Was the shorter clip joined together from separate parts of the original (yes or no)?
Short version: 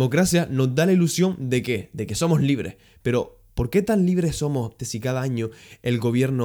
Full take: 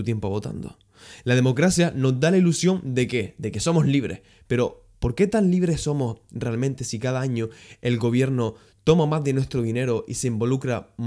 yes